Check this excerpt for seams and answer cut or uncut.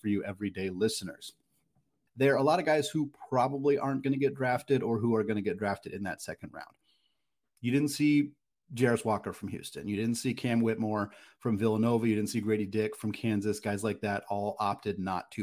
cut